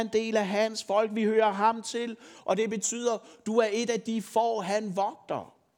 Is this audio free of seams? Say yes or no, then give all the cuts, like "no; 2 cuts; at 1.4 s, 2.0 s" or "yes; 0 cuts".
yes; 0 cuts